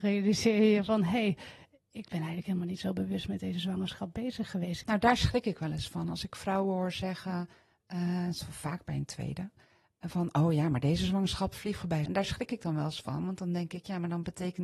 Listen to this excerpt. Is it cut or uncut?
cut